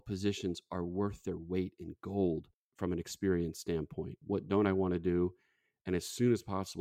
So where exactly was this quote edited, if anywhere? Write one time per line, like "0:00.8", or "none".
0:04.2